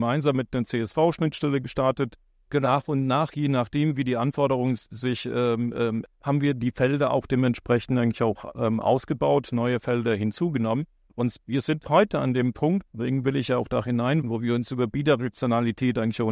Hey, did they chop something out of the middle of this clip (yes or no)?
yes